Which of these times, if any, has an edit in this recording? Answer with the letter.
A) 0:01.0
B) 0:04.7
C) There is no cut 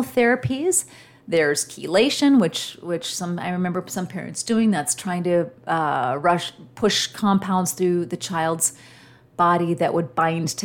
C